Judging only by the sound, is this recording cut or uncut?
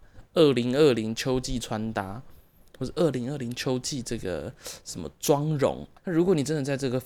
cut